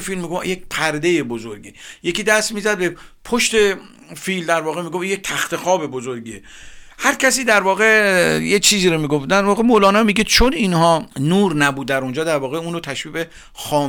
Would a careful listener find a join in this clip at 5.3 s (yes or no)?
no